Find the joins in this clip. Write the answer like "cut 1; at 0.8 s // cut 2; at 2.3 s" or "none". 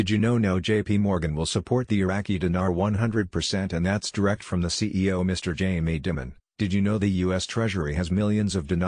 none